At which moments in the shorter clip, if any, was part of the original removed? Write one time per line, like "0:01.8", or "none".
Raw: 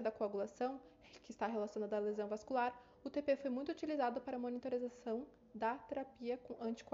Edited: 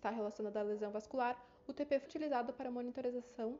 0:02.1